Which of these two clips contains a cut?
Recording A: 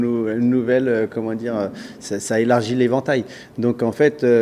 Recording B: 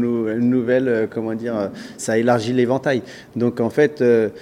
B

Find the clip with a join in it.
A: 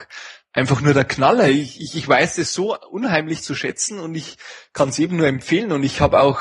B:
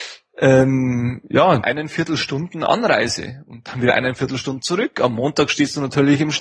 B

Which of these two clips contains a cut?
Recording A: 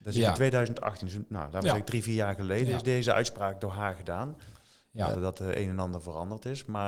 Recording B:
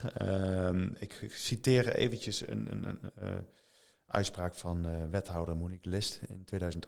A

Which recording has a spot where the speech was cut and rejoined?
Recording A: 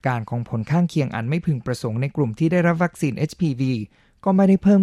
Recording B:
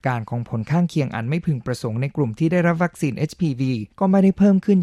B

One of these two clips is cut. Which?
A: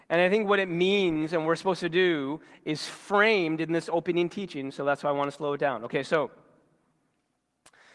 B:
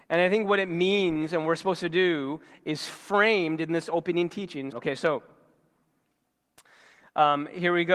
B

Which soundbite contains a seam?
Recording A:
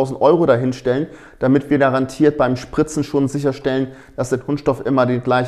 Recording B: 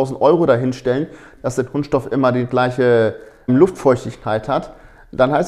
B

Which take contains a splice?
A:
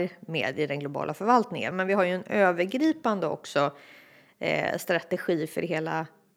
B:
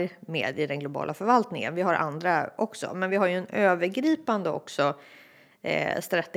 A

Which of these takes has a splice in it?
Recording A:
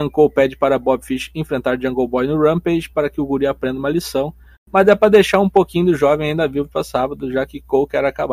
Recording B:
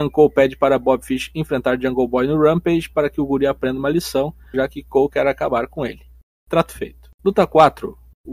B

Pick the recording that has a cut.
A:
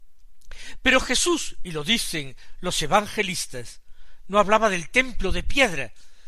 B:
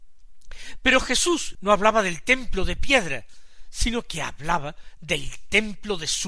B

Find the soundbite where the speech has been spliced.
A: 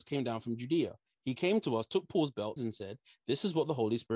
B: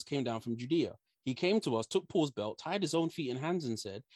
A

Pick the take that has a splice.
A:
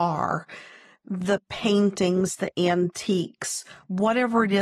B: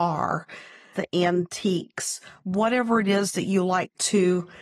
B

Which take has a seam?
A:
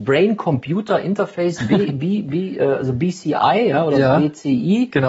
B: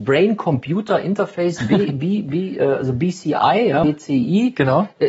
B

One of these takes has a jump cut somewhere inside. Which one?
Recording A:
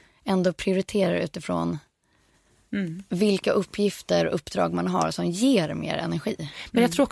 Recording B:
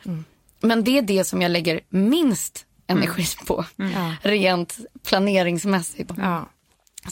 B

